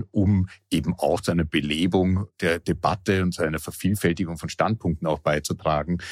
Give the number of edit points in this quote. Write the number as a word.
zero